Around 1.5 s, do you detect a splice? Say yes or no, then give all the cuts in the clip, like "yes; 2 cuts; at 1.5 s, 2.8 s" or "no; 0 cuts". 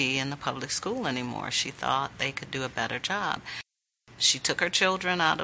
no; 0 cuts